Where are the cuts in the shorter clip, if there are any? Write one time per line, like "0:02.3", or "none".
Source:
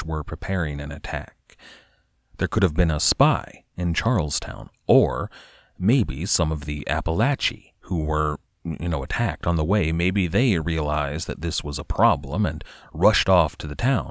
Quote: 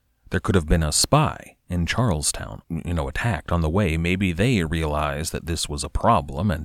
0:02.6